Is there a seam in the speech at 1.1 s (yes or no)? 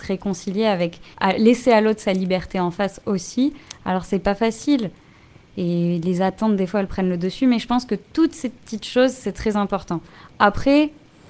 yes